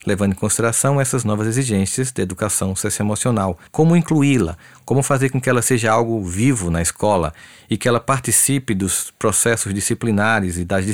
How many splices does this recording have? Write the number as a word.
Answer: one